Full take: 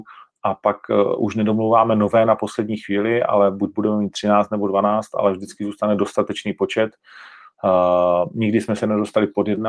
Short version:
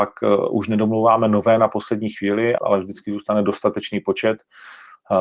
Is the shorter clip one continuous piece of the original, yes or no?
no